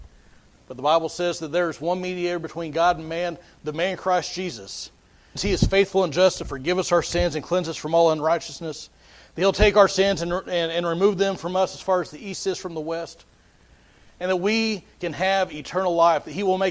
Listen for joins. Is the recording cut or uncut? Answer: cut